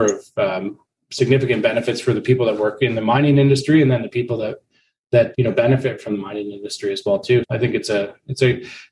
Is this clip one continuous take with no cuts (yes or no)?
no